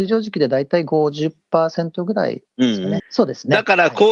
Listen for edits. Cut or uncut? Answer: cut